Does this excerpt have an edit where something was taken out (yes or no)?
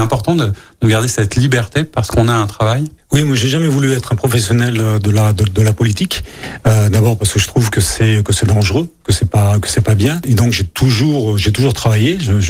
no